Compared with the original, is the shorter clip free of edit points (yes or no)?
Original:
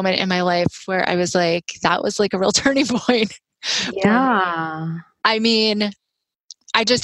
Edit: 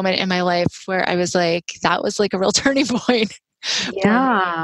yes